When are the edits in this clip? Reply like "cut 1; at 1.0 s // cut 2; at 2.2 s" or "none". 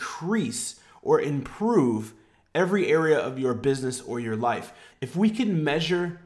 cut 1; at 4.9 s